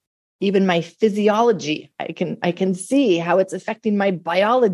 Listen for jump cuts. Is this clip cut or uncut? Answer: uncut